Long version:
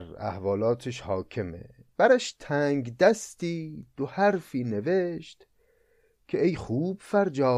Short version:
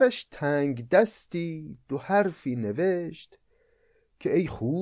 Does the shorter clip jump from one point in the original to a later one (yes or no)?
no